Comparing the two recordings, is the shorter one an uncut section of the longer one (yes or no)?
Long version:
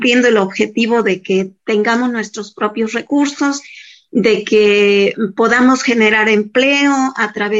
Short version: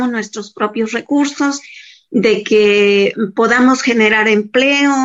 yes